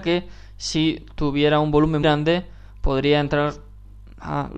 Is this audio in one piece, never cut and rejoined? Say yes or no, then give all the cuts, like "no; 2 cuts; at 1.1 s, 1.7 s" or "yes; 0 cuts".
no; 1 cut; at 2.0 s